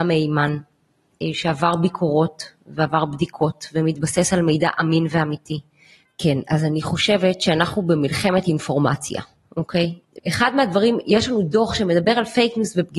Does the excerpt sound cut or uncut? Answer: cut